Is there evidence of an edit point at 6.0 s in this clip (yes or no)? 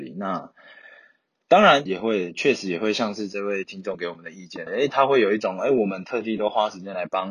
no